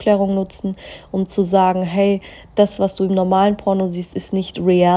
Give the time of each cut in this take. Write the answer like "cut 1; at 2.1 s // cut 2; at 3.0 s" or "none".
none

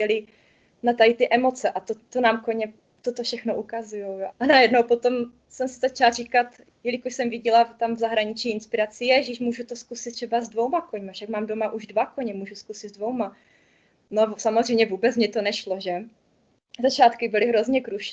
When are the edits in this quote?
cut 1; at 4.3 s

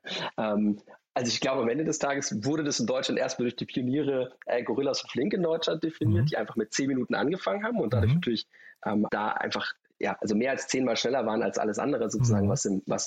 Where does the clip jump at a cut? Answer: cut 1; at 9.1 s

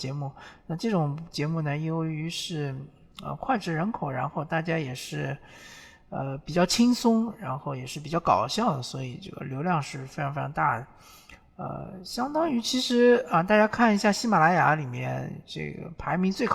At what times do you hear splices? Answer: none

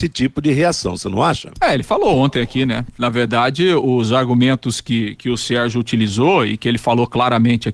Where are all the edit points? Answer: none

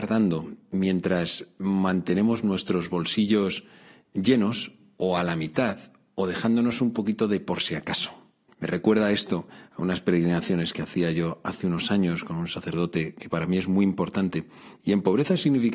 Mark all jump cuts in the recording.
cut 1; at 8.5 s // cut 2; at 14.7 s

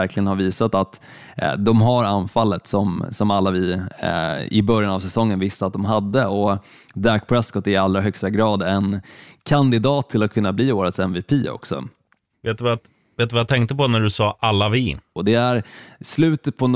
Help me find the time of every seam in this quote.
cut 1; at 12.3 s // cut 2; at 15.2 s

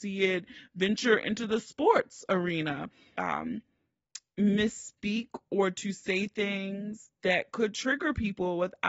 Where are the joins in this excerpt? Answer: cut 1; at 3.2 s

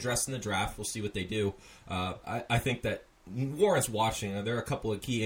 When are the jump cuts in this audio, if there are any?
cut 1; at 2.2 s

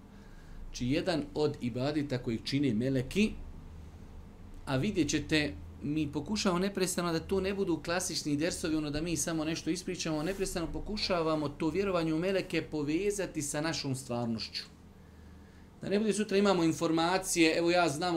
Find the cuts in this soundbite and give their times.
none

